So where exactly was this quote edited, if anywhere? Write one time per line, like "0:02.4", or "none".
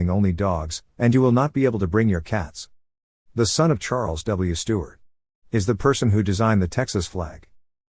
0:03.1